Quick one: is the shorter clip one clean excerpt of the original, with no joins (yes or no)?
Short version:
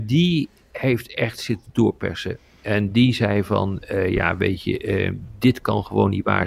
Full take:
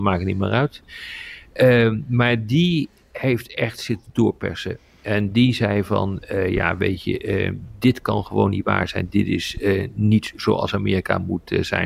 yes